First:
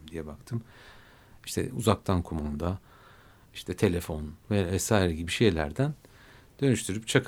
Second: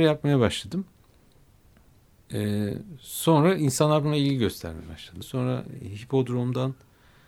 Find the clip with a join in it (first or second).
second